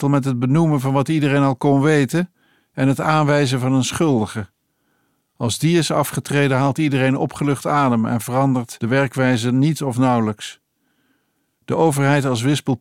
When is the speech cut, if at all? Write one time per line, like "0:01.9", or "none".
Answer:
none